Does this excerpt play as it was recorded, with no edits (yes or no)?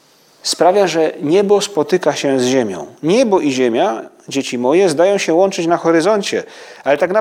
yes